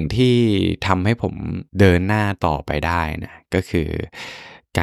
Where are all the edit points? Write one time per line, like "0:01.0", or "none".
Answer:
0:01.7